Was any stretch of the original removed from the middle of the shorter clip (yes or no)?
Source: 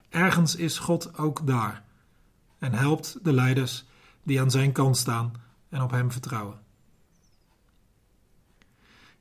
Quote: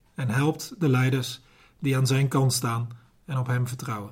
no